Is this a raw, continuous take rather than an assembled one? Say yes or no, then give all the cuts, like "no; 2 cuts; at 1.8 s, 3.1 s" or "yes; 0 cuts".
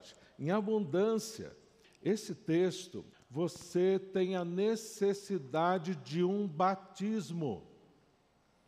no; 2 cuts; at 1.8 s, 3.1 s